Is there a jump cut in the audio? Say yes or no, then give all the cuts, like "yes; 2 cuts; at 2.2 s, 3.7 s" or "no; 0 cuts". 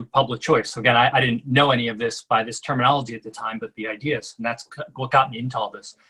no; 0 cuts